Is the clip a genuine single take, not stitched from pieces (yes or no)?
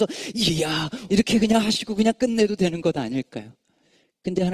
no